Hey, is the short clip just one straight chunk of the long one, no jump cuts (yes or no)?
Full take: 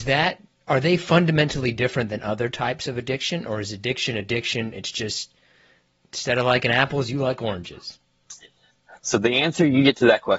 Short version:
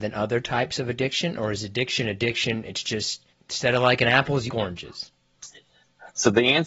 no